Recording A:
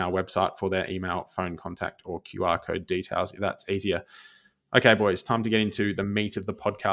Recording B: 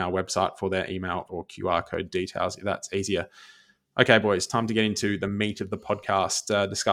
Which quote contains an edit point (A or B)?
B